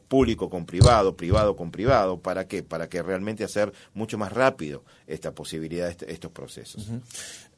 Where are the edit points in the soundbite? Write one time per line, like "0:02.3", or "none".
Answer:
none

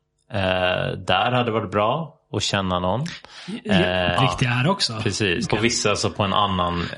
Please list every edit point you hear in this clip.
0:04.2
0:05.4

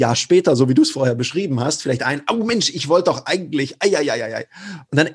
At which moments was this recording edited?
none

